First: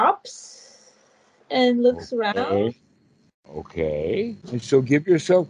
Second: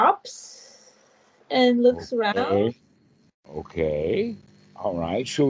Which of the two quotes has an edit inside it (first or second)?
first